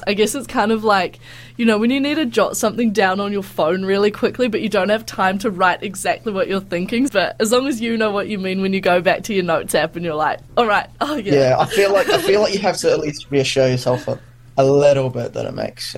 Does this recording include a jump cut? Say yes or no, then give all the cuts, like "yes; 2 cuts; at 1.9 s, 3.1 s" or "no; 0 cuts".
yes; 1 cut; at 7.1 s